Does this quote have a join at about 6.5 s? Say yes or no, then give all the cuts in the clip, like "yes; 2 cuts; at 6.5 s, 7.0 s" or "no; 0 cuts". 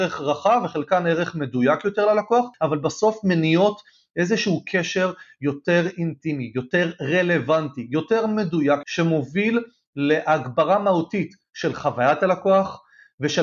no; 1 cut; at 8.8 s